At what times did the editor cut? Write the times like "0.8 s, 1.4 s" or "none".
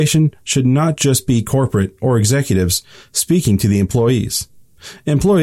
none